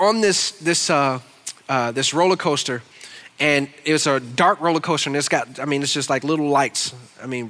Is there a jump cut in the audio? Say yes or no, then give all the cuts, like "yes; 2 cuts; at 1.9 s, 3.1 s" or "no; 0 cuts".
no; 0 cuts